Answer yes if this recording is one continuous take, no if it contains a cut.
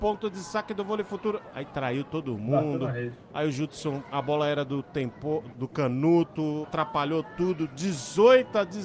no